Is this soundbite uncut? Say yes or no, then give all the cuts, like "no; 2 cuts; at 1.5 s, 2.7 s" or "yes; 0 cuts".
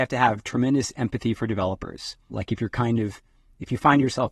no; 1 cut; at 2.3 s